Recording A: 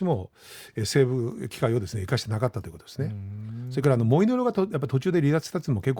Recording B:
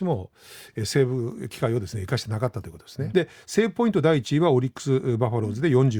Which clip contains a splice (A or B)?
B